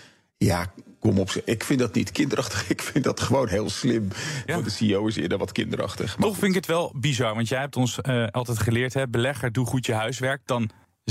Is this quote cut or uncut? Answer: cut